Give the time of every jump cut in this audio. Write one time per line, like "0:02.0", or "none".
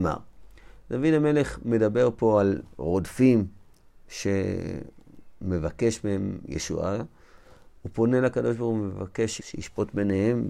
0:09.4